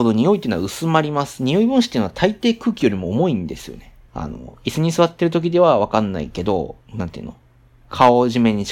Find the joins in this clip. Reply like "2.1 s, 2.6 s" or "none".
4.1 s, 6.8 s